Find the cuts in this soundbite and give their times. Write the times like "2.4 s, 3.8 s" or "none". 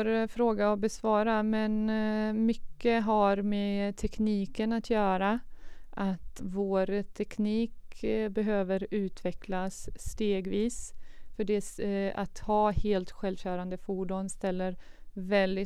6.4 s, 11.3 s